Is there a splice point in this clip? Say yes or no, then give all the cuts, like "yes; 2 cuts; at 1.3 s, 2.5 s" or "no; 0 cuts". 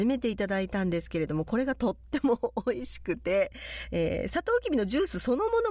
no; 0 cuts